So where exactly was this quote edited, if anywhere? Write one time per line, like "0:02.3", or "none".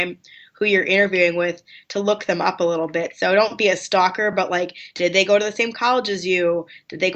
none